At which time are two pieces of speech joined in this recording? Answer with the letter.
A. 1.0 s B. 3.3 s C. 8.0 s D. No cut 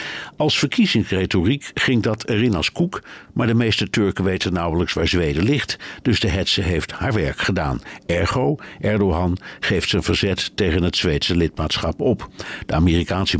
D